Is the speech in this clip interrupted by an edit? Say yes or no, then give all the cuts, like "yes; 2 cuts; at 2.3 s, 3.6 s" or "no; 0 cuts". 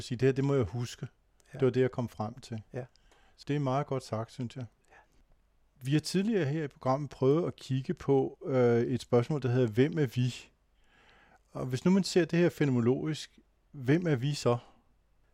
no; 0 cuts